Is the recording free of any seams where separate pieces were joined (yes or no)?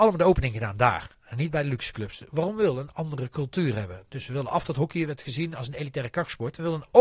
yes